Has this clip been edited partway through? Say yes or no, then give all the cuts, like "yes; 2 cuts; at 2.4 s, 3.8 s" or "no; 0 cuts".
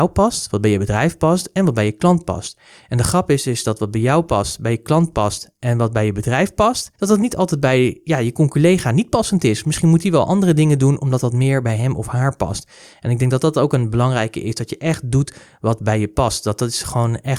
yes; 1 cut; at 7.0 s